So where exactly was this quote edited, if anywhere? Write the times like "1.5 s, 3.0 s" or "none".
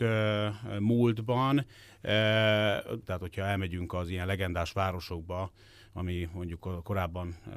3.0 s